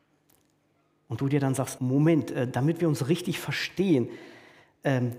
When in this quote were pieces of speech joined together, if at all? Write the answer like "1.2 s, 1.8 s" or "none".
1.8 s